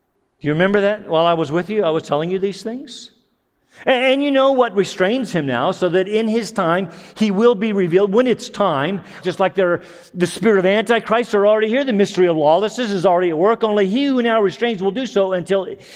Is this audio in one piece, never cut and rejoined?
no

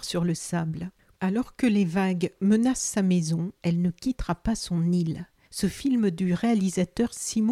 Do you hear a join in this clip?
yes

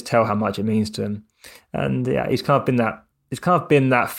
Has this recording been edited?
no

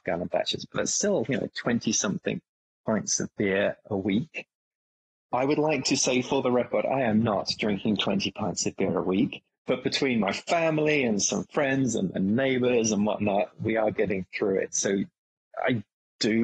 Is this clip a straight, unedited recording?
yes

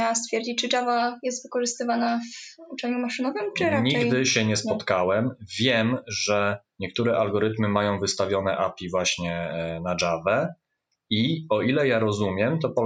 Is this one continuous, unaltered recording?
yes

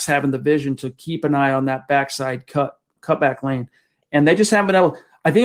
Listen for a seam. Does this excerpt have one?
yes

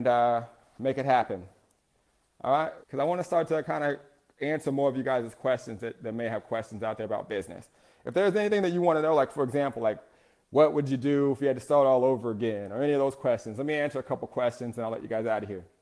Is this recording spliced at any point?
yes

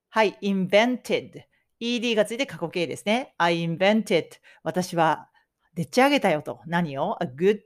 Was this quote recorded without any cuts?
yes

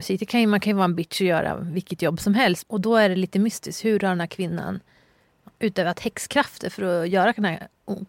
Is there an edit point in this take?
yes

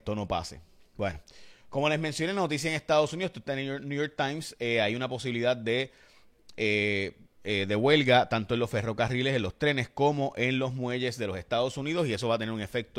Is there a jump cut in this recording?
no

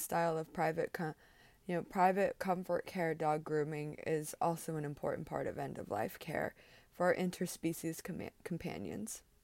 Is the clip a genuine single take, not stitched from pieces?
yes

